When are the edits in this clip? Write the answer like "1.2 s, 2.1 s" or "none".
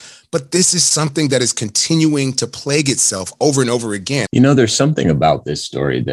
4.3 s